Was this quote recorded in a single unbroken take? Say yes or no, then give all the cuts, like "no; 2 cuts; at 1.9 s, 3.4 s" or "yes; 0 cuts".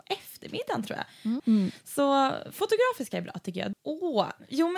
no; 2 cuts; at 1.4 s, 3.7 s